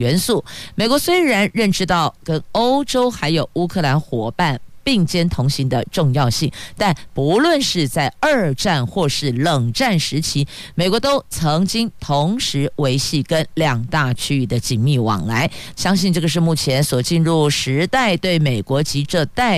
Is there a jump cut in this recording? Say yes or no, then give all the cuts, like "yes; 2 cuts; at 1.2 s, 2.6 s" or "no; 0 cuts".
yes; 1 cut; at 15.8 s